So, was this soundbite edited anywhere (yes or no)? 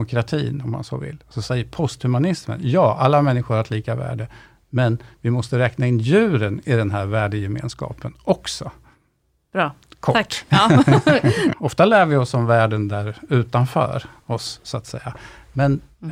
yes